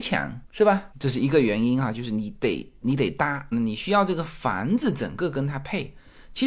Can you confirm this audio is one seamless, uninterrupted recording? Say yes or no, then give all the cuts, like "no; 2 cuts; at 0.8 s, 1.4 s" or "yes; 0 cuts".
no; 2 cuts; at 0.9 s, 3.5 s